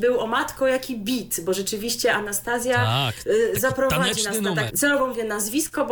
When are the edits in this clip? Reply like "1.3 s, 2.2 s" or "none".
4.7 s